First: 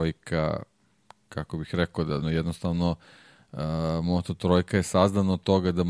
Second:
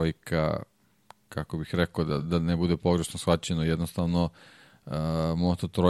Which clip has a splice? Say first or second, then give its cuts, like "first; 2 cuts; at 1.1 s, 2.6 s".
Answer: first; 1 cut; at 2.2 s